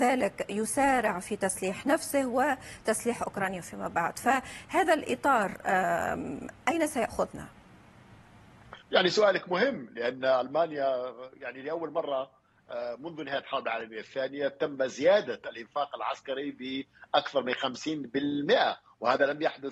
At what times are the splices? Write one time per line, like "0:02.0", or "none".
0:08.8